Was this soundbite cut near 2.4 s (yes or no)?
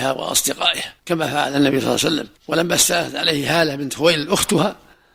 yes